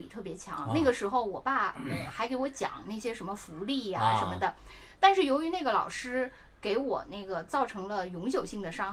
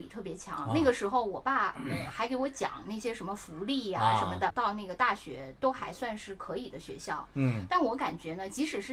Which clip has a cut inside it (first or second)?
second